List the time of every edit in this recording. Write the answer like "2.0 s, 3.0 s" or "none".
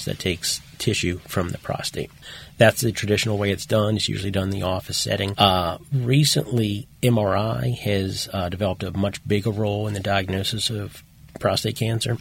5.3 s